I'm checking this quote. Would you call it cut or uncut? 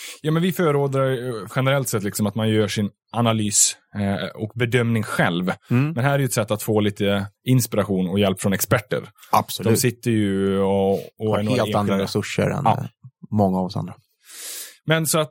cut